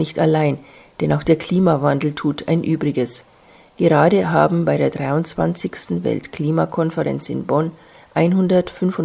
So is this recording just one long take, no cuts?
yes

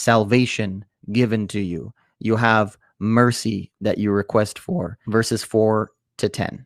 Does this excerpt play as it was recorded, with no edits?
no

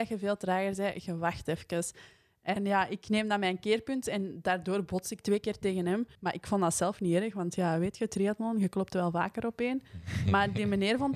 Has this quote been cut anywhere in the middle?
yes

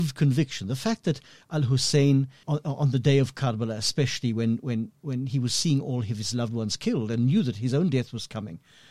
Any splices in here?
yes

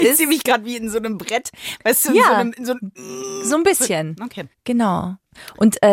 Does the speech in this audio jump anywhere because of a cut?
no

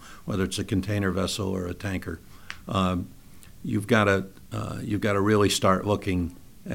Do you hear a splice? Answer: no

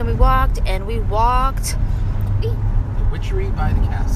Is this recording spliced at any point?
yes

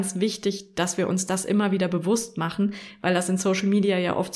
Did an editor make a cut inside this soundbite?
no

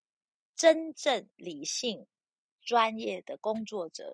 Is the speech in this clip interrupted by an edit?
no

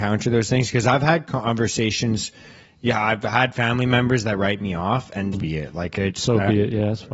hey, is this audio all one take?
no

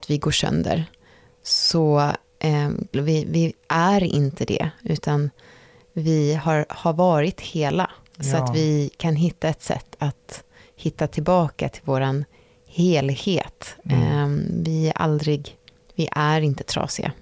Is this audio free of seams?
no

